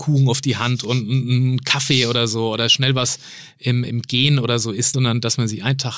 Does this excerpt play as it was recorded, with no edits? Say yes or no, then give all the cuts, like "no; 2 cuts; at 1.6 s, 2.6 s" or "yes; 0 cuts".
no; 2 cuts; at 3.8 s, 4.9 s